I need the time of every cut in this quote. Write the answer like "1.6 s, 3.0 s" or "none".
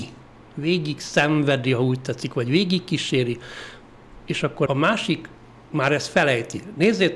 4.7 s